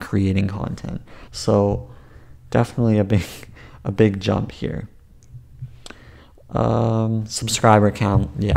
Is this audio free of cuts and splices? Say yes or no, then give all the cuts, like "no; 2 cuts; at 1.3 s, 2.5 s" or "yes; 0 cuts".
no; 1 cut; at 1.3 s